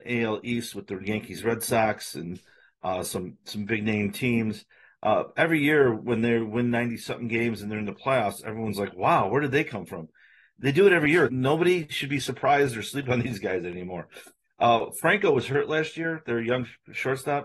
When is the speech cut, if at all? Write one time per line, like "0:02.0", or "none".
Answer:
0:11.3